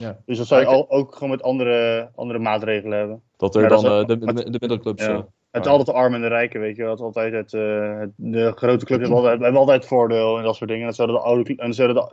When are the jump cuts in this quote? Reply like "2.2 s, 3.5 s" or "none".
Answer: 3.3 s